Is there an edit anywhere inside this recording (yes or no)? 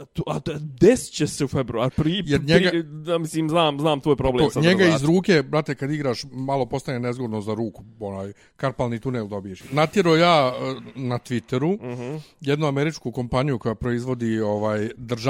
yes